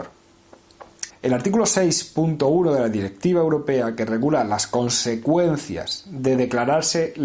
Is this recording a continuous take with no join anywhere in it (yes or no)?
no